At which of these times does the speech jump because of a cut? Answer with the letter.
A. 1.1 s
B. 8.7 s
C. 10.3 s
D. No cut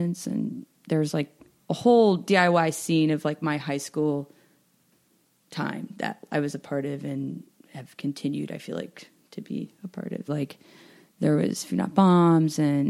C